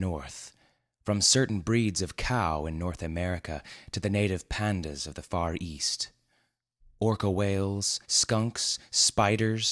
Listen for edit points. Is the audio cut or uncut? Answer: cut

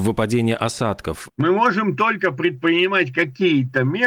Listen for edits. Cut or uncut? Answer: cut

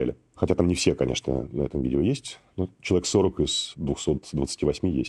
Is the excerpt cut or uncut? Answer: uncut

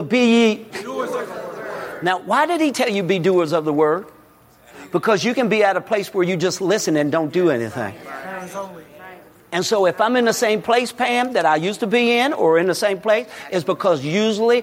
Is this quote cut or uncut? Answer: uncut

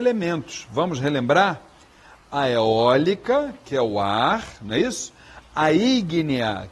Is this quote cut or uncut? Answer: uncut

